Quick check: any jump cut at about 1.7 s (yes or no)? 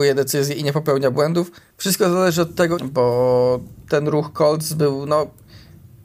yes